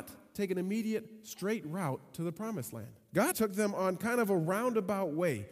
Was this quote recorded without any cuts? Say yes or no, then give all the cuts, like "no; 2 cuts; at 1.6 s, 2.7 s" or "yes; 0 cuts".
no; 1 cut; at 3.3 s